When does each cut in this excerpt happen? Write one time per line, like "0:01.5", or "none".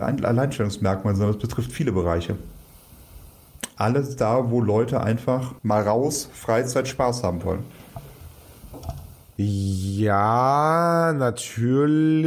0:05.6